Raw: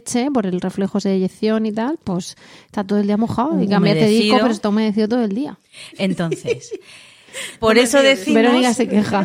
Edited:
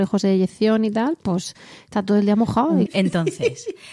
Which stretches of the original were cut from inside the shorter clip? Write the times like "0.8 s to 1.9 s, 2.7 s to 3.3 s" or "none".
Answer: 3.7 s to 5.9 s